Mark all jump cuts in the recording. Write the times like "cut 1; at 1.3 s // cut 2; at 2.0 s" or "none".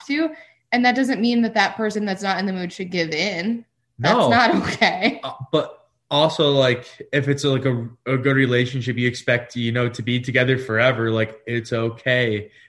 none